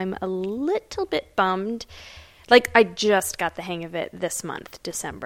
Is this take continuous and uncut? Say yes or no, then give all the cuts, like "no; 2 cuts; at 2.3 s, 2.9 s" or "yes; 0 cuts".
yes; 0 cuts